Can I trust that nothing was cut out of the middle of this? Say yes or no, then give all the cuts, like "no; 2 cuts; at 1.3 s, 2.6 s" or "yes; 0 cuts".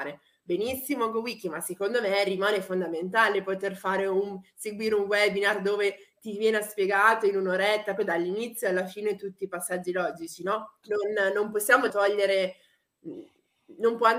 no; 3 cuts; at 8.0 s, 10.8 s, 11.9 s